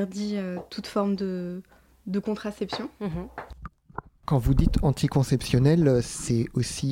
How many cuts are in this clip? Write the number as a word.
zero